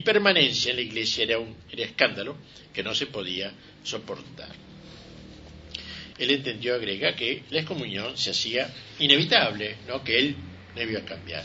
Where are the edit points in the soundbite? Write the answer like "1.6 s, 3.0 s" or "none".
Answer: 6.1 s